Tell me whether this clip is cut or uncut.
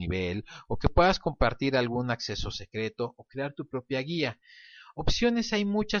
uncut